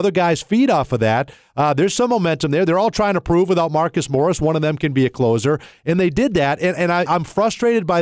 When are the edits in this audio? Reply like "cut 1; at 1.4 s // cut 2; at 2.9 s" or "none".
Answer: cut 1; at 7.1 s